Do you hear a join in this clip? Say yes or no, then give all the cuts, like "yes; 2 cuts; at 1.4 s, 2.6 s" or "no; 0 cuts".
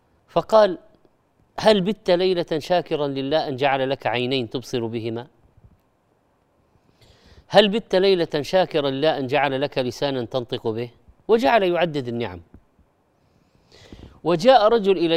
no; 0 cuts